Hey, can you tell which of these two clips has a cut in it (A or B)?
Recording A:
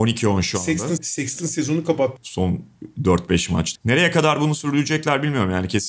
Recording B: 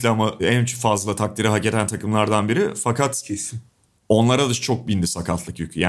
A